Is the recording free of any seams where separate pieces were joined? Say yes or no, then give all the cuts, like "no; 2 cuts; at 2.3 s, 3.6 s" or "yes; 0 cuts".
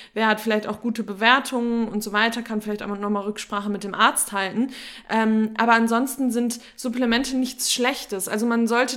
yes; 0 cuts